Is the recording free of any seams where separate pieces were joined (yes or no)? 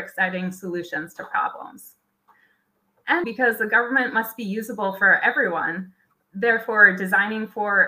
no